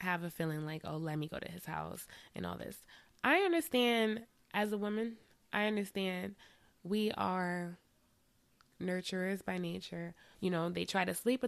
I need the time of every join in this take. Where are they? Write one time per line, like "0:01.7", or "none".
0:10.3